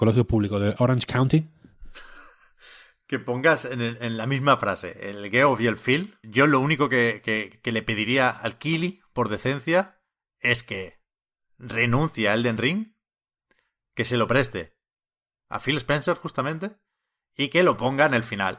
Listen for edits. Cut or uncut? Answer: cut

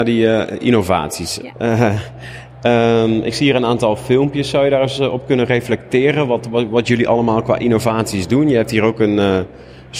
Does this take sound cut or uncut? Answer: cut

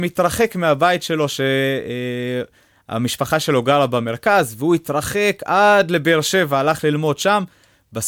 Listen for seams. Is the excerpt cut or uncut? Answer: uncut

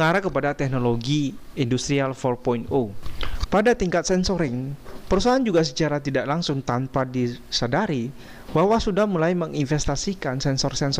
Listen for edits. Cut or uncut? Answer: cut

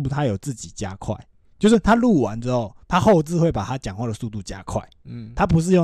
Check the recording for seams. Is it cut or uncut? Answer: uncut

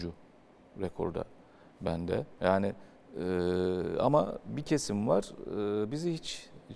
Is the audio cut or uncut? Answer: uncut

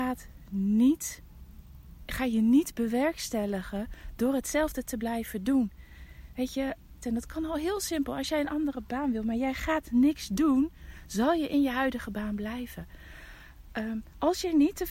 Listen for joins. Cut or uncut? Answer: cut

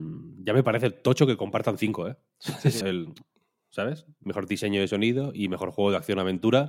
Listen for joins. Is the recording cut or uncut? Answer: cut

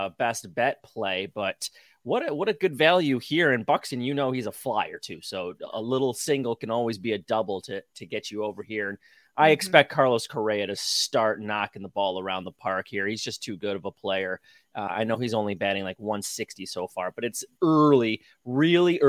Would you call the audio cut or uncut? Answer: uncut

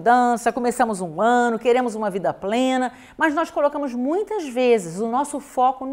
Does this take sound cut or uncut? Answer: uncut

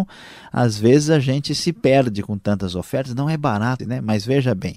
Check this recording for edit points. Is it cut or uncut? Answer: cut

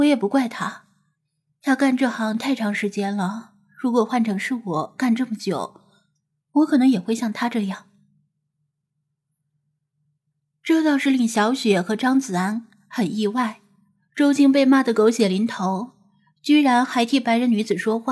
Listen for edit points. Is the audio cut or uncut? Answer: uncut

